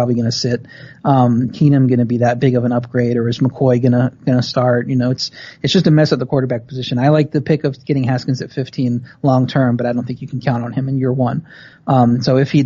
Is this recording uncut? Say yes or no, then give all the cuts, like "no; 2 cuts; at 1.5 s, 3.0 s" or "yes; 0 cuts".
no; 1 cut; at 1.5 s